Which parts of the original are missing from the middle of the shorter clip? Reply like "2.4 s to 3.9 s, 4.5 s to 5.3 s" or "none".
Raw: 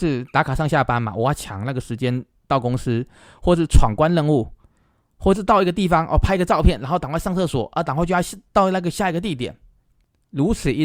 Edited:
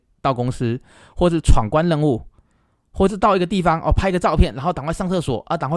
none